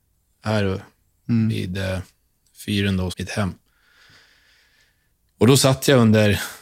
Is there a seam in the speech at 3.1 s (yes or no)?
yes